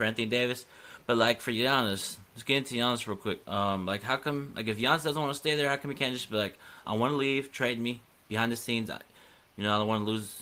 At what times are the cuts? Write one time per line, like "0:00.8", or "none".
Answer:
0:06.8

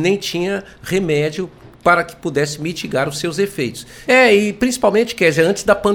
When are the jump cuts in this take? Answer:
0:04.0

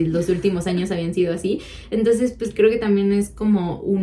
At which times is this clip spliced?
none

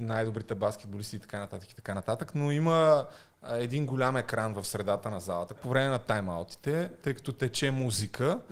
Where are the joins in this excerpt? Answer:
0:05.6
0:07.0

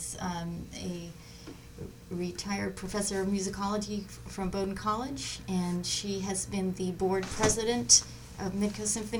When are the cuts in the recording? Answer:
none

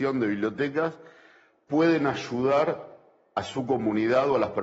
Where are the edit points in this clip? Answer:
none

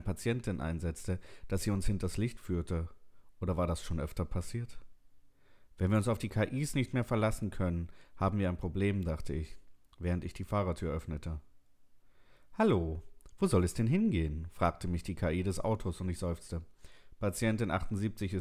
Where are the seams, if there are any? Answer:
none

